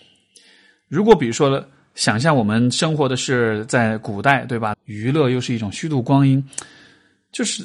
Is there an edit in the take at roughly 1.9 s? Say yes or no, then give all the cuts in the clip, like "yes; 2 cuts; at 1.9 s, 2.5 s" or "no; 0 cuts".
no; 1 cut; at 4.7 s